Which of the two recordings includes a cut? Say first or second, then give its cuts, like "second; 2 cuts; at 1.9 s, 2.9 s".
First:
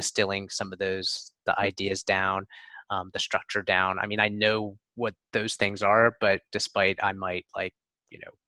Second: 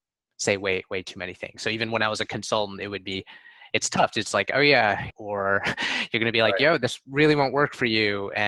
second; 1 cut; at 5.1 s